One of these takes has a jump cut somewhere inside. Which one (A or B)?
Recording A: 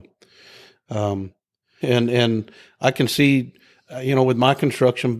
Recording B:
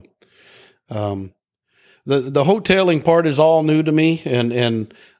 A